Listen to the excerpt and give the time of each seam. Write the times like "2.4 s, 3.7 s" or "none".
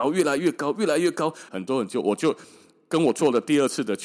1.5 s